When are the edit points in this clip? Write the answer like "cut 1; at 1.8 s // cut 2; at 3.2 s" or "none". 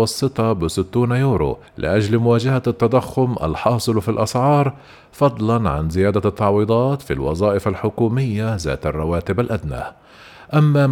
cut 1; at 1.7 s